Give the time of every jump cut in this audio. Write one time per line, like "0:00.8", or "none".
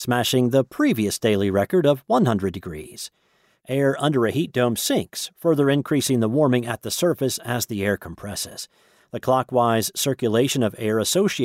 0:03.6